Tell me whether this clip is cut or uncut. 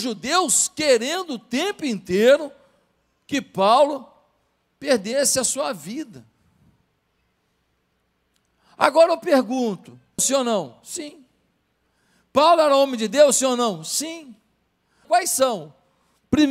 cut